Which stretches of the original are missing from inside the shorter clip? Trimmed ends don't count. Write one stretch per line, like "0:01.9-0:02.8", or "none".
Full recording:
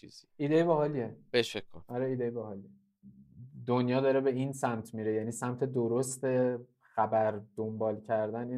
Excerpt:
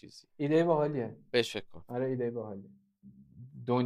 none